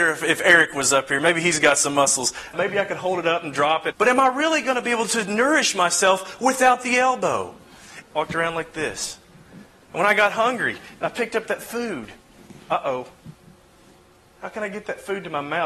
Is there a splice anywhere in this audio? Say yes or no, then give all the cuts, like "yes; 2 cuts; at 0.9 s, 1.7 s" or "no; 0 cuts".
yes; 3 cuts; at 2.5 s, 3.9 s, 8.0 s